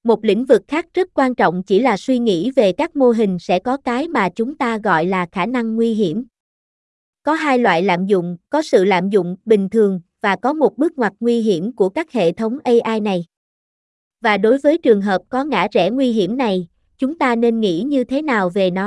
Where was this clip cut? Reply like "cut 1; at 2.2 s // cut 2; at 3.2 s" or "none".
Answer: cut 1; at 8.4 s